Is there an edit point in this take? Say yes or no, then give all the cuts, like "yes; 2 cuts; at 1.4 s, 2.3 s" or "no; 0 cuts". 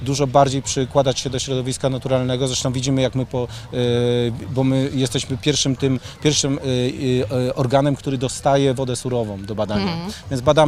no; 0 cuts